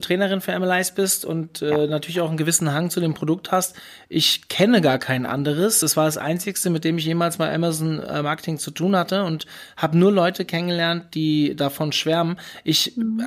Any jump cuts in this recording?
no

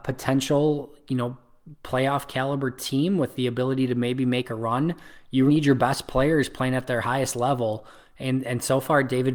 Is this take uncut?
no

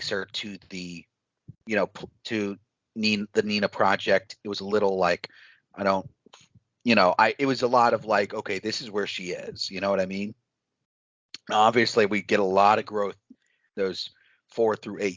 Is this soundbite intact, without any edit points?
yes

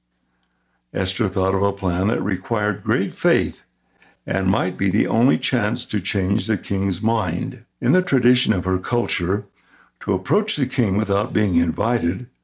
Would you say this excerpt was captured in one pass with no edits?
no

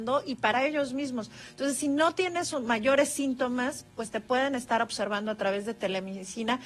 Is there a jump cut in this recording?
no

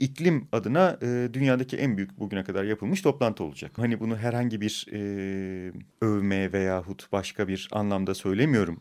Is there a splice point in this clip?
yes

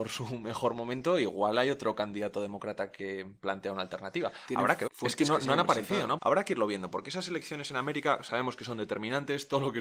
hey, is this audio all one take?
no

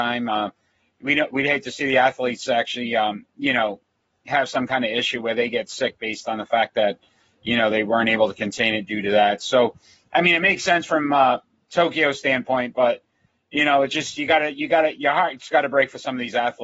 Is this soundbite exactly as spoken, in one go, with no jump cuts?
yes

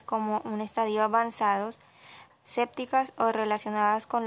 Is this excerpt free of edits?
no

